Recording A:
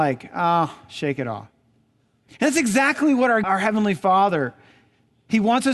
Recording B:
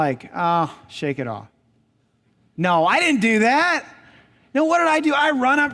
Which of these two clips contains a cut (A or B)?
A